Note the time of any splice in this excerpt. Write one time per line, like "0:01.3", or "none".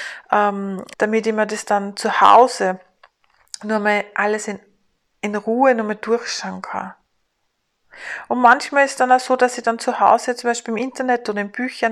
0:00.9